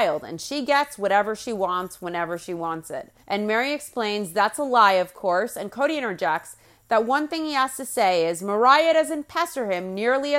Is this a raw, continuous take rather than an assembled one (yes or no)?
no